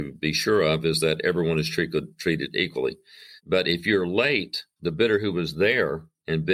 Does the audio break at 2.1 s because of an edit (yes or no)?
no